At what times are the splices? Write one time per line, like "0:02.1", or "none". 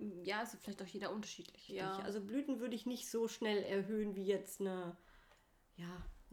0:01.7